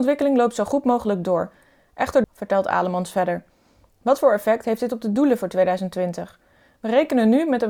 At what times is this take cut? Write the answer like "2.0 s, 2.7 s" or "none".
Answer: 2.2 s